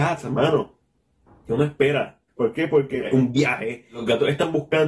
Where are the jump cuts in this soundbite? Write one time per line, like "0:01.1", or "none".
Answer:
0:02.3